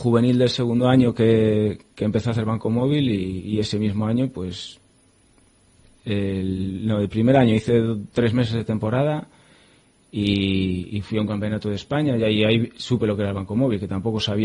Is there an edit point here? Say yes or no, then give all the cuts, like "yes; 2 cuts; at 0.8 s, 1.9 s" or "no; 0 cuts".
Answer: no; 0 cuts